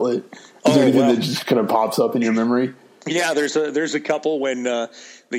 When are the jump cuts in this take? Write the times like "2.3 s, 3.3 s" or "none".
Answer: none